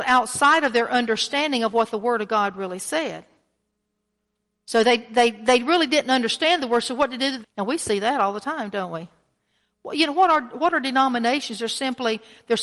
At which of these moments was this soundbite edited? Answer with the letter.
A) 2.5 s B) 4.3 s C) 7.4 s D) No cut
C